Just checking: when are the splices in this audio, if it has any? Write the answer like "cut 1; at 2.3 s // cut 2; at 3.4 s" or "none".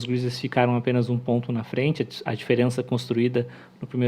none